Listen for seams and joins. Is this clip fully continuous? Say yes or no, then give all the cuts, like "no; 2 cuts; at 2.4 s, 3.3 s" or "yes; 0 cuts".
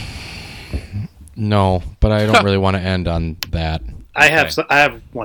yes; 0 cuts